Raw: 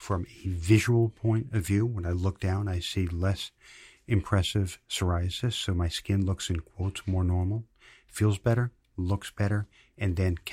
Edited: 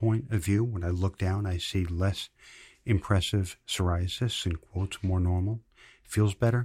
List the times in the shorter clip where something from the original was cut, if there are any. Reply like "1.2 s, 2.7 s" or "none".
4.4 s